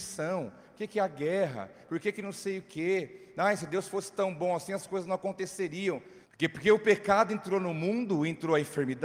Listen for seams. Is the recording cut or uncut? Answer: cut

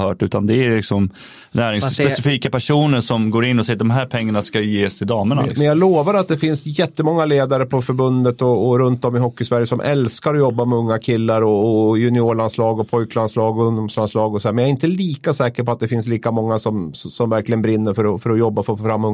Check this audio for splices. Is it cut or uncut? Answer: uncut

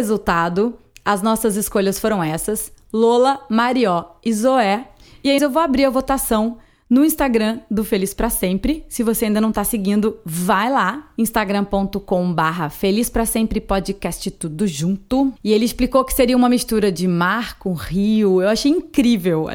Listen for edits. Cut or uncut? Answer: cut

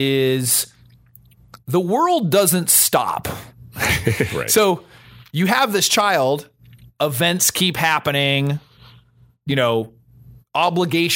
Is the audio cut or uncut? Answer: uncut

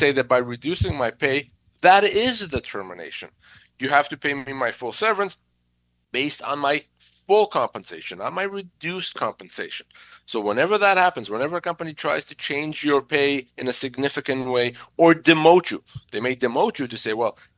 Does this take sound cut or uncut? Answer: uncut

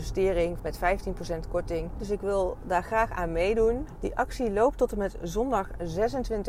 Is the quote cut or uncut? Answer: cut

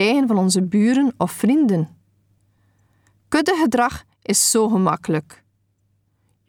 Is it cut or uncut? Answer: uncut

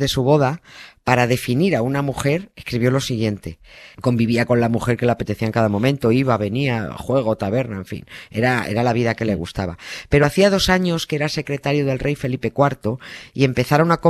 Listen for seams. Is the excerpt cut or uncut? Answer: cut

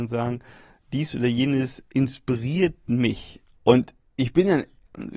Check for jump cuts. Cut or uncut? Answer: cut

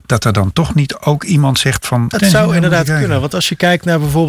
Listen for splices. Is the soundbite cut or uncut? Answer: cut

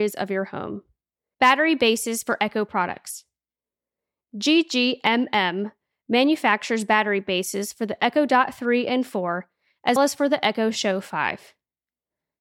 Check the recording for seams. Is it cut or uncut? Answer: cut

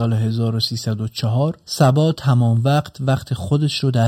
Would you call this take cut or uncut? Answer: uncut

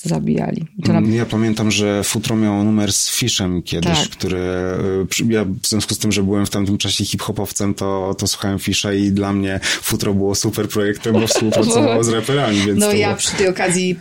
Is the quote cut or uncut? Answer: cut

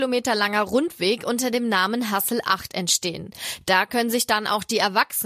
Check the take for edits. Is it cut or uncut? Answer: uncut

